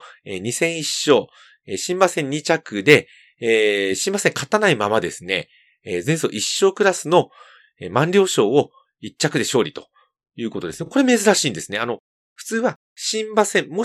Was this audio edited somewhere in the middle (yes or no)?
no